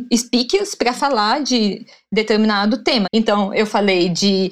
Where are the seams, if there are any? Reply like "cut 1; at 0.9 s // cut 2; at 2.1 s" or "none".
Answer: cut 1; at 3.0 s